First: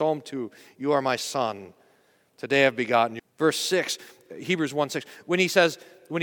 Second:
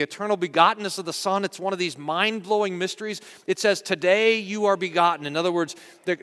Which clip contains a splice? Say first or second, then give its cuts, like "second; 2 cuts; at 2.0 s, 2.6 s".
first; 1 cut; at 3.2 s